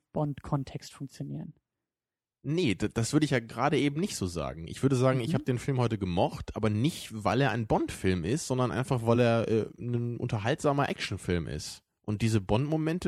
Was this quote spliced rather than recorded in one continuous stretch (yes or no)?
no